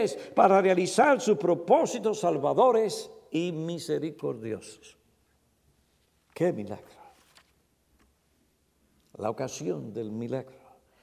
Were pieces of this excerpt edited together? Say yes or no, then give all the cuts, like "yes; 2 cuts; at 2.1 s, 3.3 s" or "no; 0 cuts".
no; 0 cuts